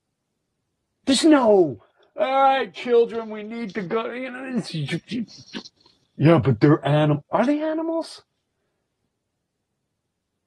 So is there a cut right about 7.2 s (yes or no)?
yes